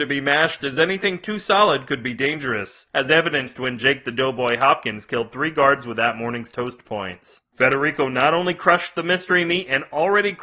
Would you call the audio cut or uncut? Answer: uncut